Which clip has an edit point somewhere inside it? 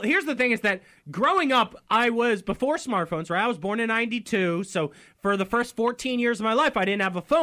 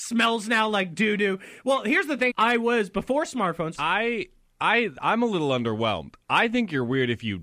second; 2 cuts; at 2.3 s, 3.7 s

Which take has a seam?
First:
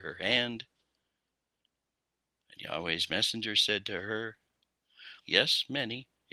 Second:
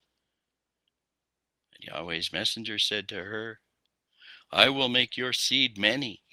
first; 1 cut; at 5.2 s

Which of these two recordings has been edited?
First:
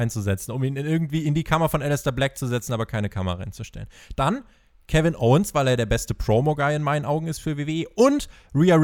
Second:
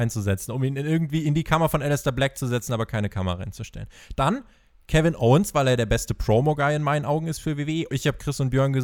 second; 1 cut; at 7.9 s

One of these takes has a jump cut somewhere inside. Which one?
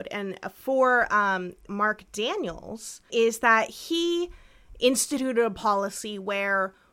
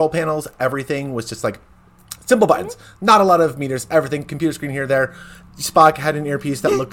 first; 2 cuts; at 1.7 s, 3.1 s

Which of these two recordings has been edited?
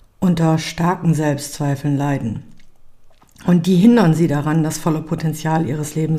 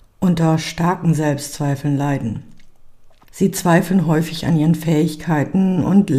second; 1 cut; at 3.2 s

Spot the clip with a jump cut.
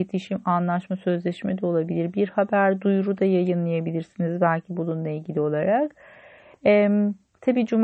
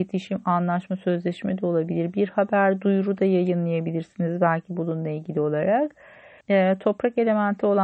second; 1 cut; at 6.4 s

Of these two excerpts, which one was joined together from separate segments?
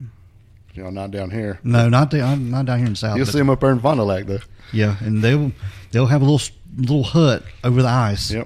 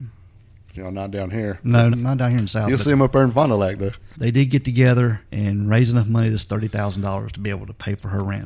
second; 3 cuts; at 1.9 s, 4.1 s, 5.3 s

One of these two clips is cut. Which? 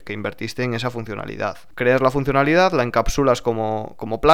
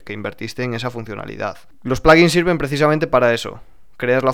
first; 1 cut; at 1.7 s

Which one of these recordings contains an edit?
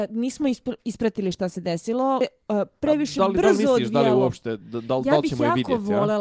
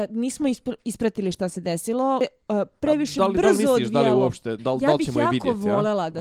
second; 1 cut; at 4.6 s

